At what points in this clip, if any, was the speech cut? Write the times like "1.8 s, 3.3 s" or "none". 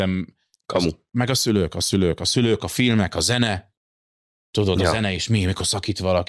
none

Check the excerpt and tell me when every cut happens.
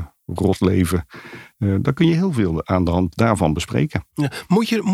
none

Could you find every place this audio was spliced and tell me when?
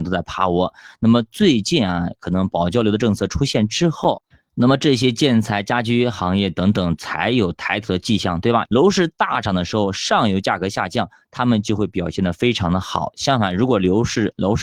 8.6 s

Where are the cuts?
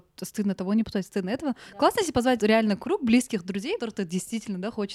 2.4 s, 3.8 s

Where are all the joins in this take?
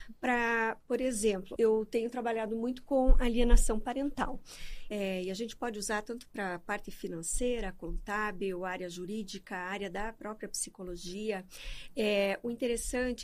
1.6 s, 4.9 s

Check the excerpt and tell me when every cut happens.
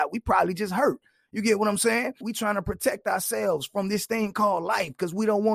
2.2 s

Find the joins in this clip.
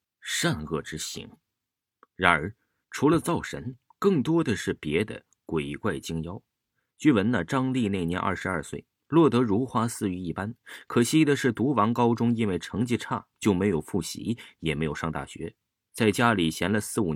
none

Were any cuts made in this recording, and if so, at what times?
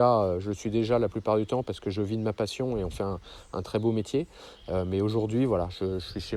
none

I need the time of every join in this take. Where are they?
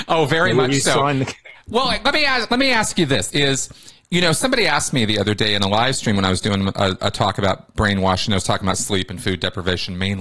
3.3 s

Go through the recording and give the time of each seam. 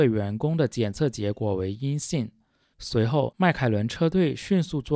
2.7 s

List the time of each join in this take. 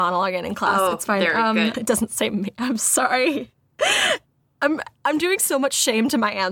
1.7 s

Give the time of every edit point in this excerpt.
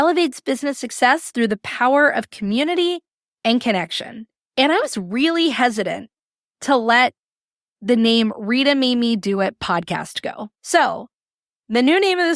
4.4 s, 10.6 s

